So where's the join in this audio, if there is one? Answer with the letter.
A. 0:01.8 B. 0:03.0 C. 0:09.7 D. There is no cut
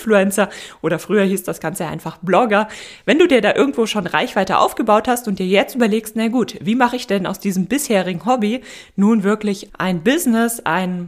C